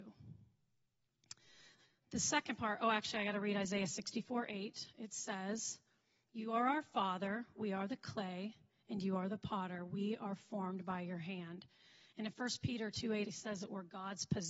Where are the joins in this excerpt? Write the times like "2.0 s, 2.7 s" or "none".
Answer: 13.2 s